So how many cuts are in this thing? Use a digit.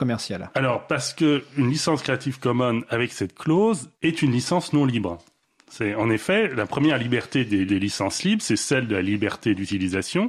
2